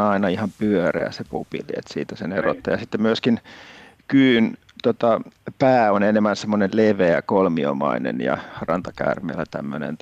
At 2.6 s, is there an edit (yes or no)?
no